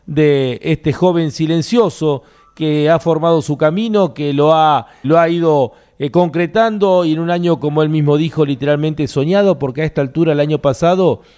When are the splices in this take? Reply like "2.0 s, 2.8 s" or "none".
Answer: 5.0 s